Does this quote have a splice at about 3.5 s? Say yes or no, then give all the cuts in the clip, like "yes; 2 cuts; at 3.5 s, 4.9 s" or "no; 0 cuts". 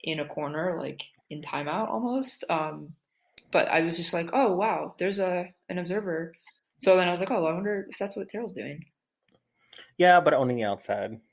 no; 0 cuts